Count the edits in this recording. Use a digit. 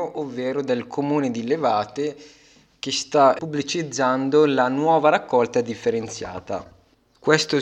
1